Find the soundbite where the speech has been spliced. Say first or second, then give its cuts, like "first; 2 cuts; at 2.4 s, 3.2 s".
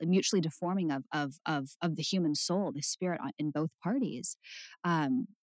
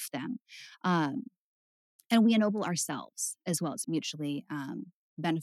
second; 1 cut; at 3.8 s